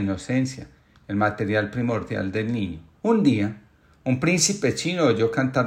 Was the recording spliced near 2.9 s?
yes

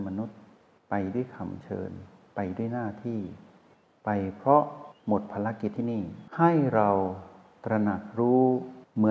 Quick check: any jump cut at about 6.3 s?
yes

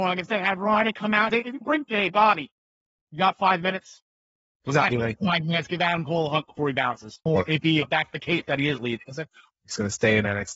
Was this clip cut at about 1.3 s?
yes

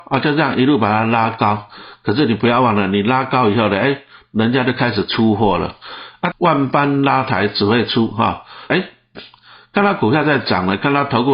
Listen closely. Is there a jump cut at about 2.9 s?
no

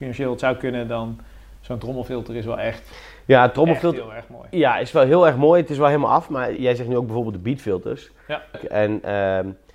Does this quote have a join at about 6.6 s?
yes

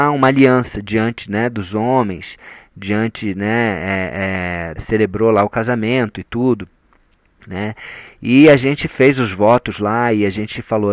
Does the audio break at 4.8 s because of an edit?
yes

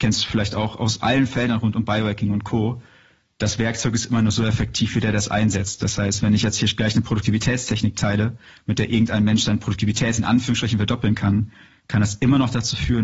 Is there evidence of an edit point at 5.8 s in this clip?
no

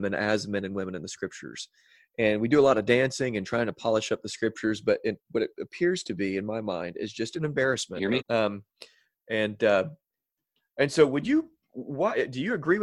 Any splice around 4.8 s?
no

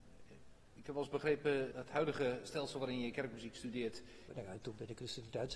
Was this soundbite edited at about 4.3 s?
yes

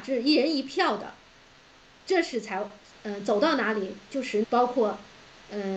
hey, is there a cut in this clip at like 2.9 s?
yes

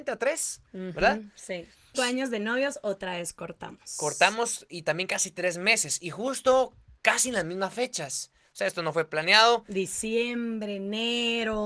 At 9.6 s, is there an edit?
no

